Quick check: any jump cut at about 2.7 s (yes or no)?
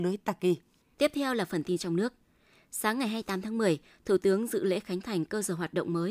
no